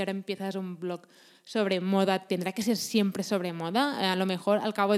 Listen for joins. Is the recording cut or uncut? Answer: uncut